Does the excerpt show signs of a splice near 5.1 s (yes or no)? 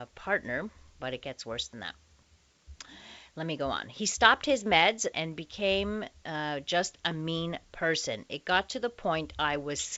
yes